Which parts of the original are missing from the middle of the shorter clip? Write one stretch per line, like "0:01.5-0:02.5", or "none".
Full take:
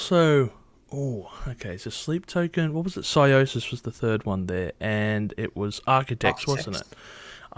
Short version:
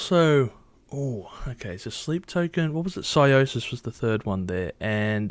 none